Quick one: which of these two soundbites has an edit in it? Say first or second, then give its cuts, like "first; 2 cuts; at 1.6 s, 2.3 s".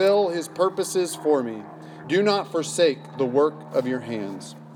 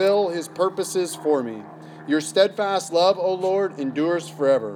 first; 1 cut; at 2.0 s